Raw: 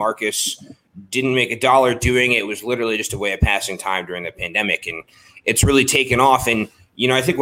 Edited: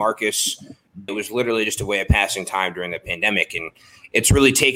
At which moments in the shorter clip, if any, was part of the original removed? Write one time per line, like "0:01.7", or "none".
0:01.1